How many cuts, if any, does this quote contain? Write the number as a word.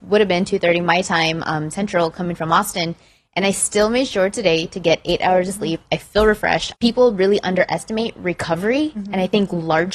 one